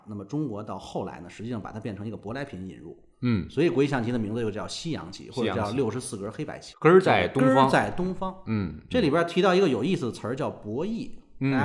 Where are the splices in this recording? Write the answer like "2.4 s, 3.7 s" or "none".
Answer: 6.7 s